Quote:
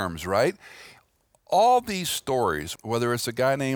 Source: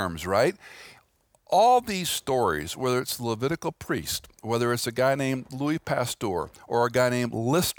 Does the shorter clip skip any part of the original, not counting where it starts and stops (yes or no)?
yes